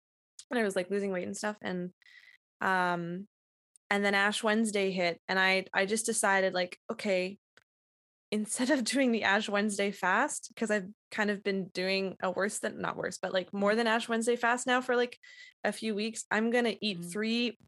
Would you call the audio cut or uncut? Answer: uncut